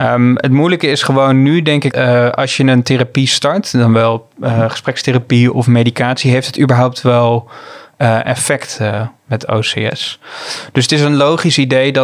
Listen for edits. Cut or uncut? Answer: cut